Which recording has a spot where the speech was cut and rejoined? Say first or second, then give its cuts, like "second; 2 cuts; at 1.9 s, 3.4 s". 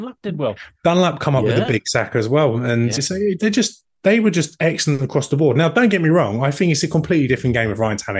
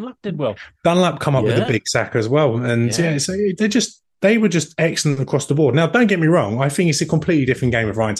first; 1 cut; at 3.0 s